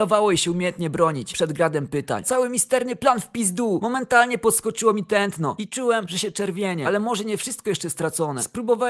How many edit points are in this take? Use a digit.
1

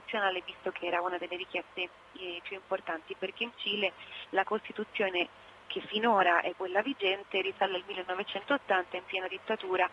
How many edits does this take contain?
1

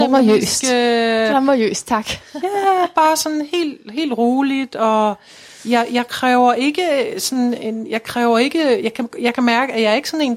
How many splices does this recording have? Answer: 0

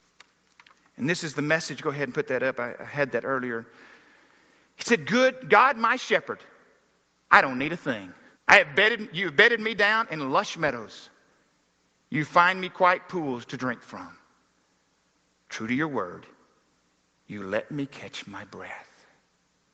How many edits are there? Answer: 1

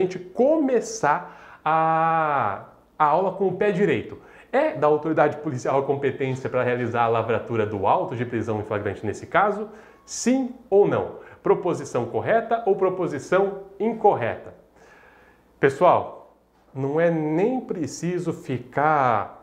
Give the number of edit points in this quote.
1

